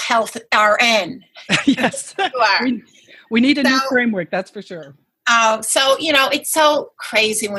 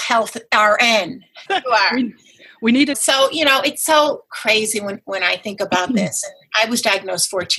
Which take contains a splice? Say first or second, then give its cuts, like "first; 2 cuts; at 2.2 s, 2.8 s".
second; 2 cuts; at 1.5 s, 2.9 s